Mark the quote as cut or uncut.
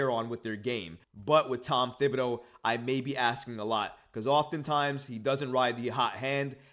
cut